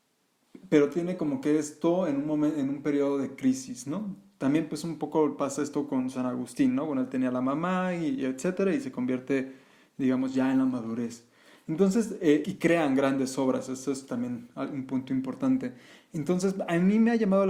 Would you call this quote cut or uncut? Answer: cut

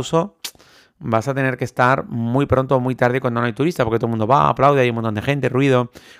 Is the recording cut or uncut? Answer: uncut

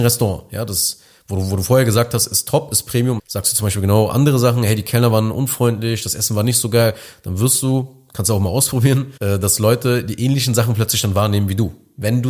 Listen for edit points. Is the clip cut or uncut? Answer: cut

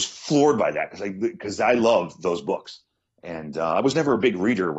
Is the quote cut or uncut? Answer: uncut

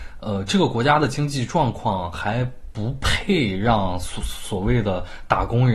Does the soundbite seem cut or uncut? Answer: uncut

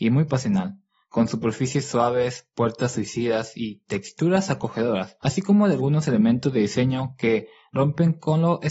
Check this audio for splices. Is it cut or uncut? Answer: uncut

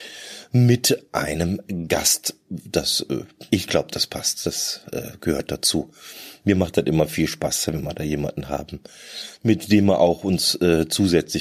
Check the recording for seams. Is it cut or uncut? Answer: cut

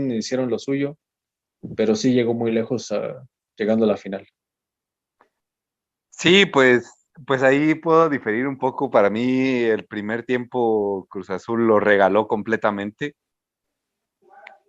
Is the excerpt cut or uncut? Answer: uncut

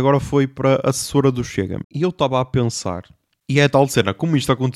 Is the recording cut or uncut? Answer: cut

